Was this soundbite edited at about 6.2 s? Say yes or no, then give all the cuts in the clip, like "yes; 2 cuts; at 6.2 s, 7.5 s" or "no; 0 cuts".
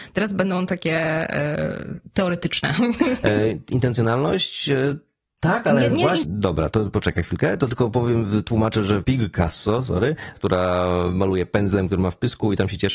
yes; 3 cuts; at 6.2 s, 9.0 s, 10.3 s